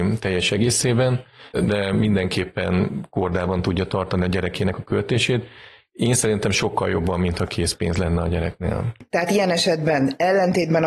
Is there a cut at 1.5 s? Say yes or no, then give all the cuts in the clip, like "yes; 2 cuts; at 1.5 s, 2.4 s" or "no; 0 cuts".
yes; 1 cut; at 1.5 s